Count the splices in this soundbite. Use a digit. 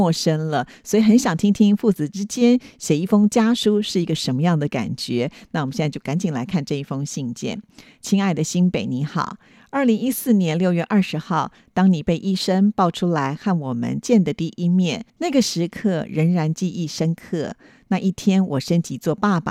1